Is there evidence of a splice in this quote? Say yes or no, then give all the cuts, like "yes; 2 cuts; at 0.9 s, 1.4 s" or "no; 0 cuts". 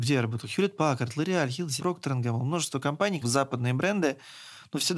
yes; 2 cuts; at 1.8 s, 3.2 s